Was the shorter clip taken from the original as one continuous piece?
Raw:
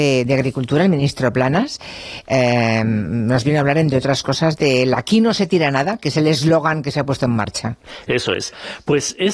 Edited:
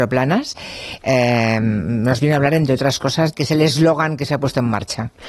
no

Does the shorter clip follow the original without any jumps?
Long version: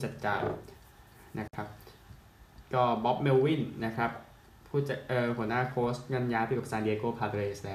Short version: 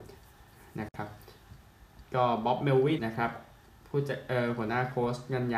no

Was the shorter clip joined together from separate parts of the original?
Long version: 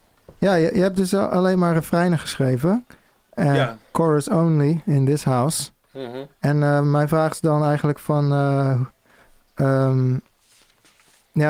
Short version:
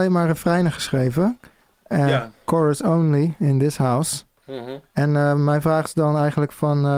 no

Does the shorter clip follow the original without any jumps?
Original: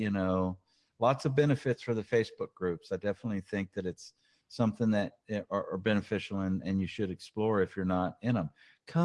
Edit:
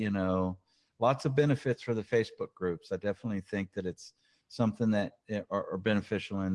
yes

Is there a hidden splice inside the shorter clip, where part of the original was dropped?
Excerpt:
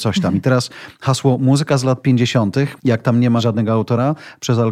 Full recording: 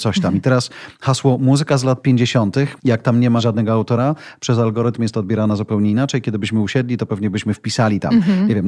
no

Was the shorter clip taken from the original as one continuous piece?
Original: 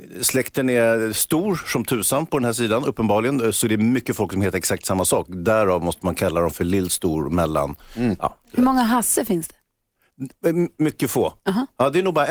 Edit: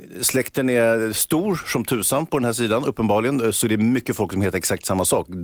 yes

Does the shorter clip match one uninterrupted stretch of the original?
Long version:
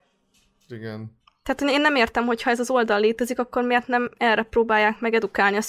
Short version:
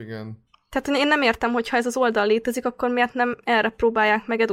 yes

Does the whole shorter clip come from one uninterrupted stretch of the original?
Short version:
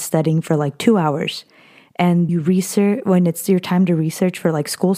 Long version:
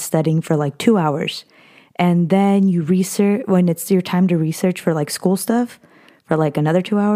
no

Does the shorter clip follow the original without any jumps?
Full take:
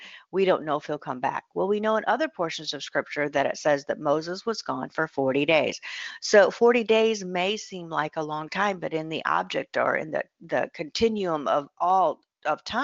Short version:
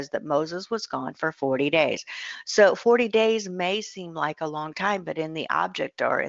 yes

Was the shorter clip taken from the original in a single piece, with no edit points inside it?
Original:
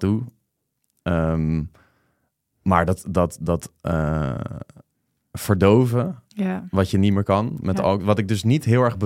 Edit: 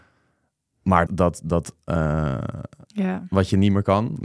no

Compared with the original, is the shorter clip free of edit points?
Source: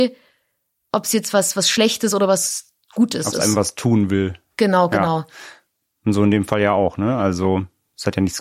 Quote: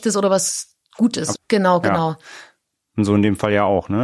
no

